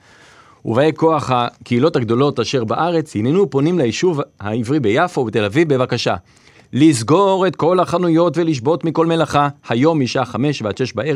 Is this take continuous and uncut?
yes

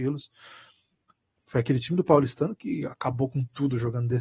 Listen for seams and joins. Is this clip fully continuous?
no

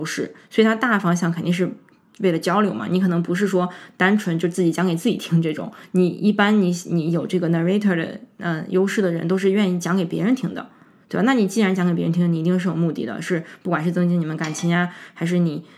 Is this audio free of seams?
yes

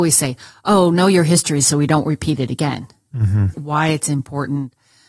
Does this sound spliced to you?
yes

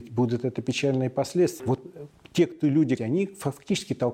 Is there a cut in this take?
yes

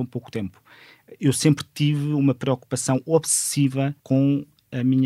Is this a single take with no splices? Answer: no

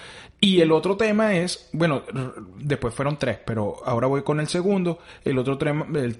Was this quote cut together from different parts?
no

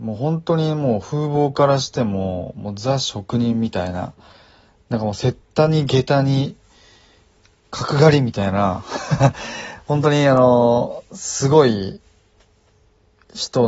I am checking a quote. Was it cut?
no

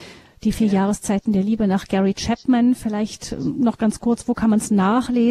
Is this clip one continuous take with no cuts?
yes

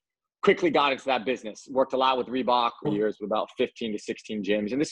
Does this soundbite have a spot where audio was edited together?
yes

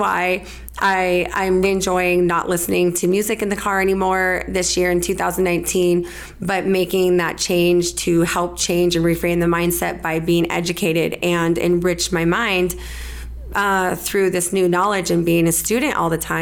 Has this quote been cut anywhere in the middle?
yes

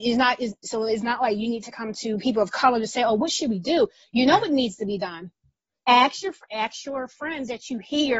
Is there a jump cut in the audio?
no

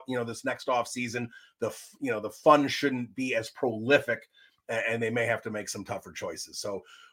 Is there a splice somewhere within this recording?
no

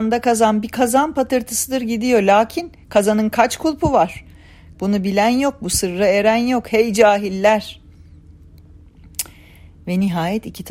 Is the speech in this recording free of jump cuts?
no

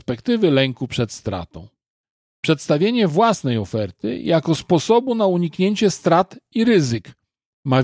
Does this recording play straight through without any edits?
yes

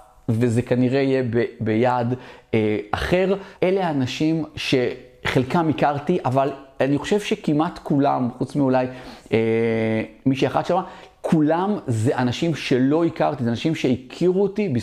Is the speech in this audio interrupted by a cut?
yes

